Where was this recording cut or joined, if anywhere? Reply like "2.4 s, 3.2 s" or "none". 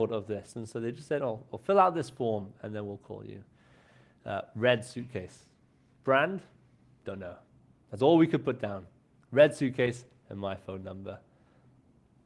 none